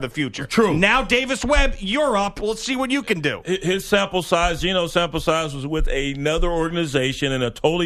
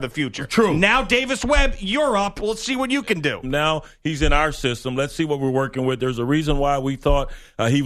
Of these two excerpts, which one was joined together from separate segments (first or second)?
second